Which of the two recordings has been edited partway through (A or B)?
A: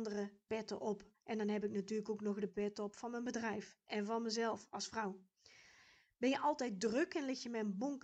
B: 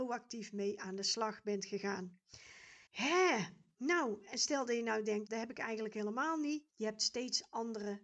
B